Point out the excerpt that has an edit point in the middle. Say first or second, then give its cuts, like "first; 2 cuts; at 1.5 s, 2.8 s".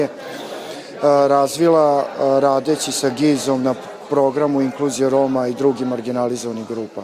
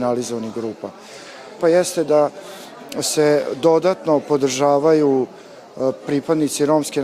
second; 1 cut; at 1.6 s